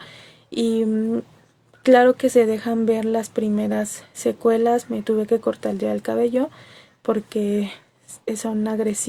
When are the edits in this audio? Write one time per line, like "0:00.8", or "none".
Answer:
none